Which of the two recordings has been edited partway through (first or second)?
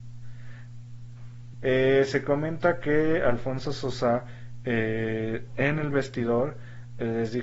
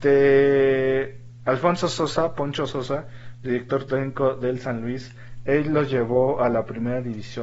first